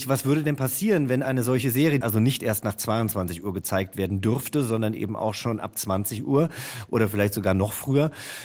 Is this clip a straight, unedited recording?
no; 1 cut; at 2.0 s

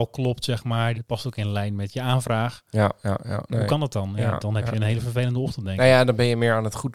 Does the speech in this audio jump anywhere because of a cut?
yes; 2 cuts; at 0.9 s, 3.5 s

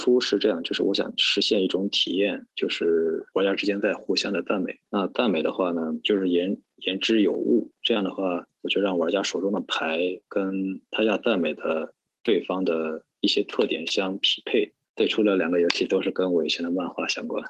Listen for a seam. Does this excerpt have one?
yes; 2 cuts; at 6.0 s, 14.9 s

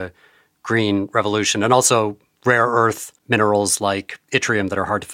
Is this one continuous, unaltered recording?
yes; 0 cuts

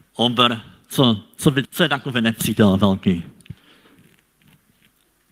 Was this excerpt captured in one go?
no; 1 cut; at 1.6 s

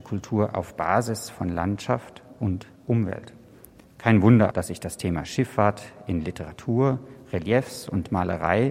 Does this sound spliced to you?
yes; 1 cut; at 4.5 s

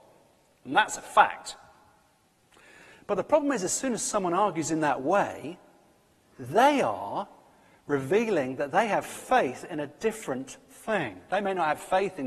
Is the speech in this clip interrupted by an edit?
no; 0 cuts

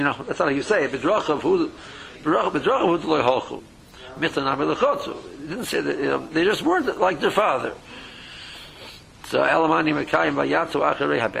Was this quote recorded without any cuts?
yes; 0 cuts

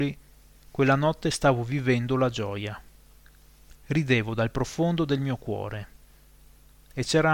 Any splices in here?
yes; 1 cut; at 3.8 s

